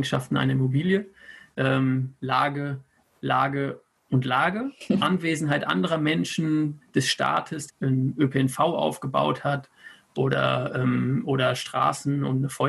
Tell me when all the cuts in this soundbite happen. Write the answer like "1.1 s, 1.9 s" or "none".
5.0 s, 7.7 s